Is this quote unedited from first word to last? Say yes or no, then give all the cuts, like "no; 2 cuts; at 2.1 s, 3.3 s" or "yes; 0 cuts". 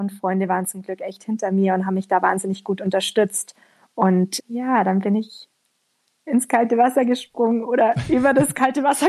no; 1 cut; at 4.4 s